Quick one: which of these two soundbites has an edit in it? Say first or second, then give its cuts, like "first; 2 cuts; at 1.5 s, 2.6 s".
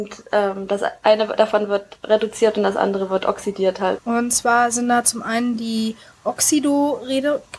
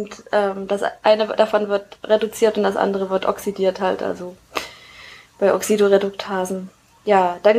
first; 1 cut; at 4.0 s